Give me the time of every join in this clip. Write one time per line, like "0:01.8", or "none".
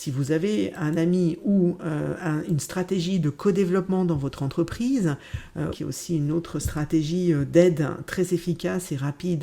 0:05.7